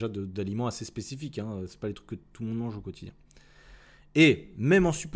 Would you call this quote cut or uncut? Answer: uncut